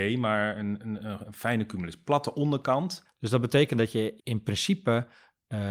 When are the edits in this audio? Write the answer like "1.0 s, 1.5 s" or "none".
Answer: 3.0 s, 4.2 s